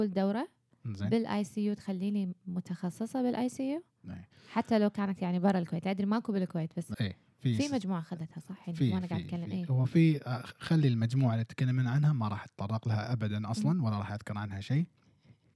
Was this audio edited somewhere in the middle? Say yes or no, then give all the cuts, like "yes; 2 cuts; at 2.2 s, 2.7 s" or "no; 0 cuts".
yes; 1 cut; at 6.9 s